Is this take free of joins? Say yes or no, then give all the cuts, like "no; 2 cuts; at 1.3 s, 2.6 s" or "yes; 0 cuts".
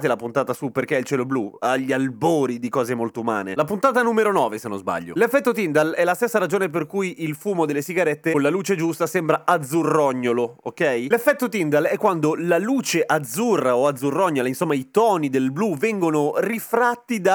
yes; 0 cuts